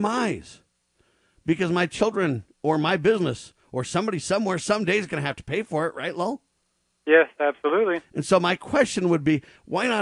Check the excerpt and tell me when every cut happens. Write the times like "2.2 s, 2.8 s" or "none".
none